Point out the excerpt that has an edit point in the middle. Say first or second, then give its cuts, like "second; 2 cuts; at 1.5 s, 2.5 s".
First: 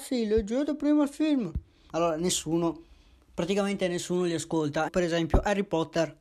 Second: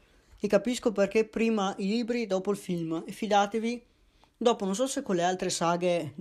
first; 2 cuts; at 1.9 s, 4.9 s